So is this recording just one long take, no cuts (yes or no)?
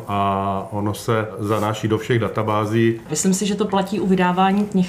no